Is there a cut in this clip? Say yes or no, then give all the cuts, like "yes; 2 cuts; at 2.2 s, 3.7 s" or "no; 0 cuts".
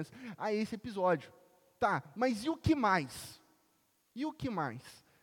no; 0 cuts